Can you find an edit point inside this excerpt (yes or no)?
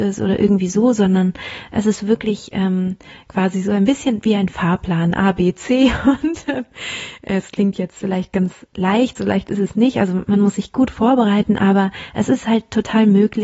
no